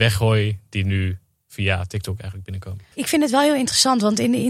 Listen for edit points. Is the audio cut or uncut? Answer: cut